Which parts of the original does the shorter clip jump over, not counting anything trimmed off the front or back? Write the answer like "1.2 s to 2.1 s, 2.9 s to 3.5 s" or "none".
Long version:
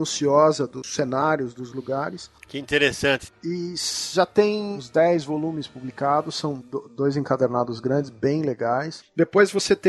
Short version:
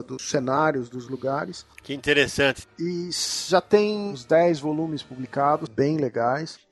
6.3 s to 8.1 s